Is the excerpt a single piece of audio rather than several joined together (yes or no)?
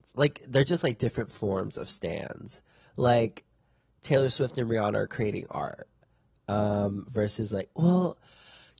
yes